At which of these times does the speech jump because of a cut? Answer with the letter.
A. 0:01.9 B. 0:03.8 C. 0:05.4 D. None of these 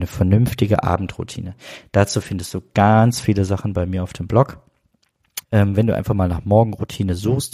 C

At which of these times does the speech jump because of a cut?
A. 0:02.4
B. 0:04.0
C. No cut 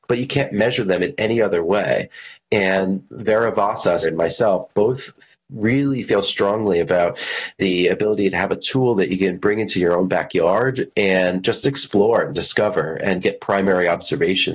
B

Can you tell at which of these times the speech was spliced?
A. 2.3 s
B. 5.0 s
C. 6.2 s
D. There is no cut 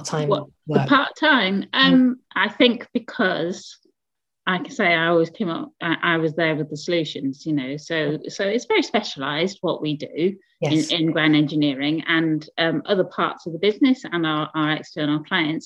A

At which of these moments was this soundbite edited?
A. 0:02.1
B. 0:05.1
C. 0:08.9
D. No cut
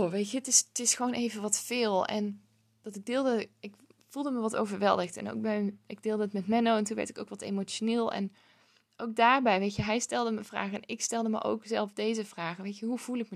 D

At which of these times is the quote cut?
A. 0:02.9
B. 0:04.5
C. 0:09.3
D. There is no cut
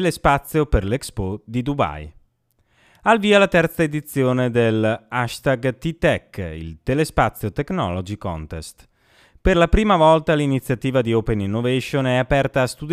D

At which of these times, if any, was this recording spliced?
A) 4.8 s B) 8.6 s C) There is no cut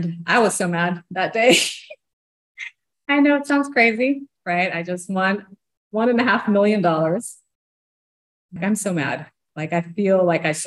B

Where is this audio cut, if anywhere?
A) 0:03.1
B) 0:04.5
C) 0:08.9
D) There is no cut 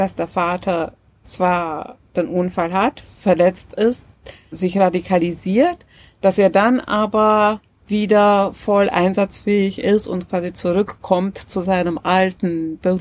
B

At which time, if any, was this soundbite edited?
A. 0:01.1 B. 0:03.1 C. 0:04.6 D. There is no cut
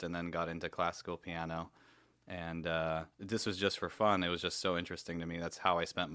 B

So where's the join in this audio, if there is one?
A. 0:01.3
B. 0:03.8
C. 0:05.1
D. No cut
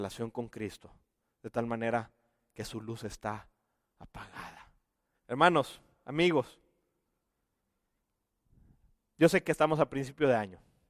C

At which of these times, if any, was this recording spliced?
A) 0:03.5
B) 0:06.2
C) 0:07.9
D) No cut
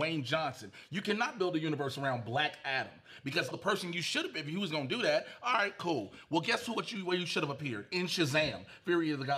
A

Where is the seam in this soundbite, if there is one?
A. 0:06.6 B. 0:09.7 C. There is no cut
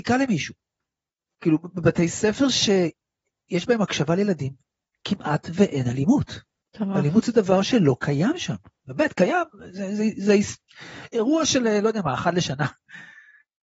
A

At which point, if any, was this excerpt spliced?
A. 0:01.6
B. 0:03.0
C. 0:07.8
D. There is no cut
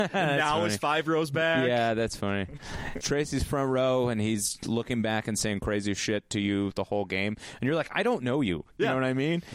B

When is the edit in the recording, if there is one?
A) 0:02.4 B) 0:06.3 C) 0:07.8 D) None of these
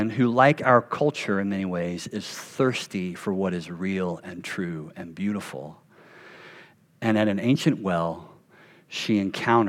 D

